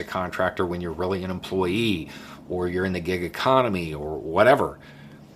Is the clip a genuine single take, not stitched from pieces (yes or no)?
yes